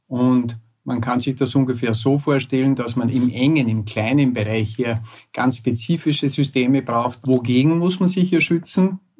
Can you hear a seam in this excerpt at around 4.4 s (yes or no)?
no